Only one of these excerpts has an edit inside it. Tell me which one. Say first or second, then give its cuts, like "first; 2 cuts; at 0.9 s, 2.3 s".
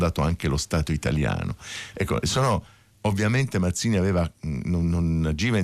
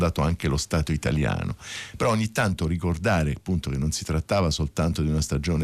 first; 1 cut; at 1.9 s